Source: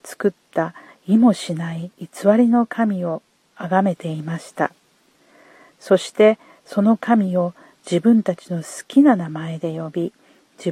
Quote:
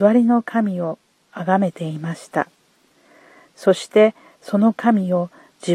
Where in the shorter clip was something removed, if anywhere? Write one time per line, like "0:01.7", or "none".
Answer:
none